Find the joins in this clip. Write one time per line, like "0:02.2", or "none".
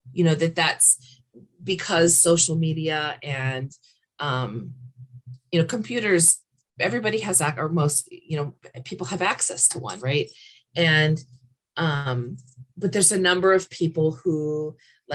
0:12.7